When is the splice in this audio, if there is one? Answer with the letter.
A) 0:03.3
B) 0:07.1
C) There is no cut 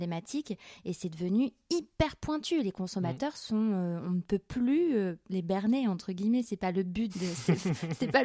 B